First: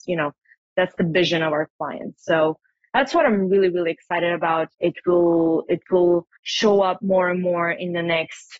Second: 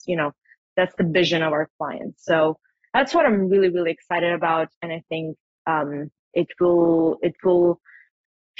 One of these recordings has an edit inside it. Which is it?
first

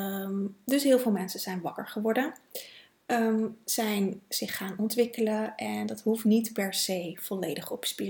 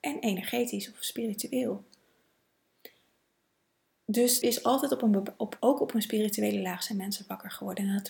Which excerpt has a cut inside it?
second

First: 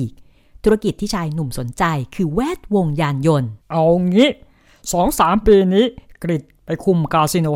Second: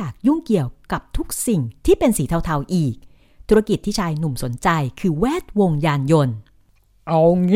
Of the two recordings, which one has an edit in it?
first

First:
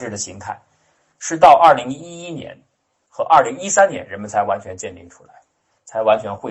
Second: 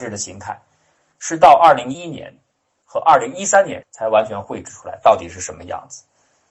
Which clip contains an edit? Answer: second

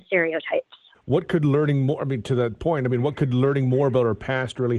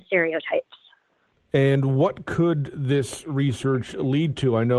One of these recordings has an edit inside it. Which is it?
first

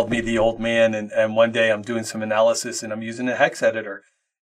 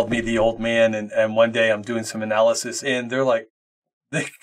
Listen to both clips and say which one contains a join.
second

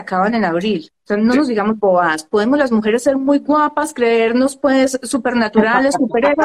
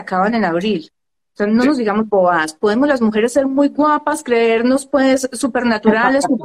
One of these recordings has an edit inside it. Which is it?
first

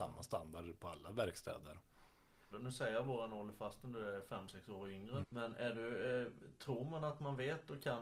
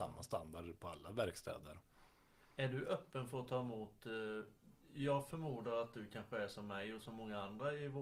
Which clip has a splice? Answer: first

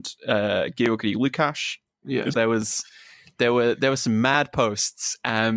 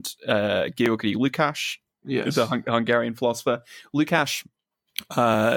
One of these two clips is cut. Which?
first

